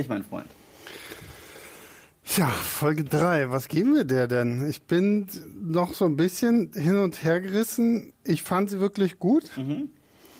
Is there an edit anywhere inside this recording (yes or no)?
no